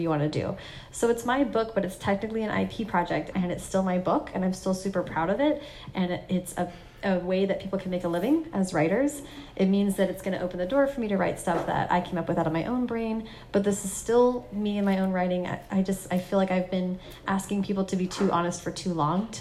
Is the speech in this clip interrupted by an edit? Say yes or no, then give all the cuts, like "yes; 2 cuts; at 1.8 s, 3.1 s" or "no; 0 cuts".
yes; 1 cut; at 3.3 s